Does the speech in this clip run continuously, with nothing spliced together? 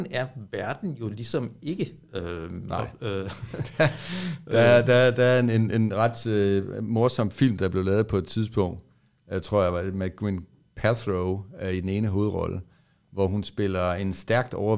yes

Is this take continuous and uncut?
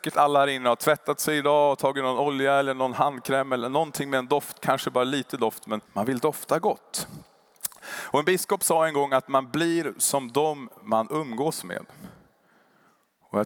no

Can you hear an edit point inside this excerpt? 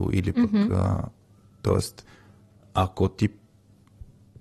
no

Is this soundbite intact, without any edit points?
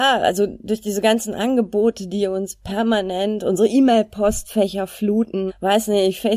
no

